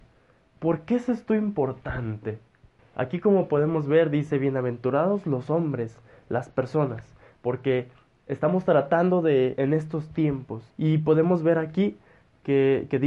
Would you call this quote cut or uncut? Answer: cut